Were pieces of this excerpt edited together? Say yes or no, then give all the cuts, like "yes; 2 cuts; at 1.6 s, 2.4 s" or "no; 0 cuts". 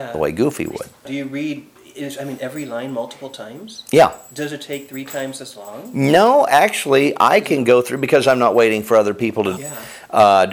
yes; 1 cut; at 9.6 s